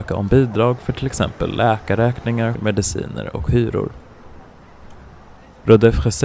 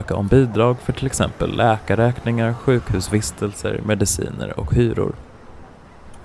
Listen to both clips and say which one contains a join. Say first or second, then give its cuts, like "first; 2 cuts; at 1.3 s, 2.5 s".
first; 1 cut; at 2.5 s